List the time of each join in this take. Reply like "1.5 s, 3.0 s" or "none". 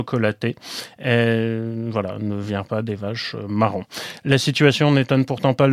none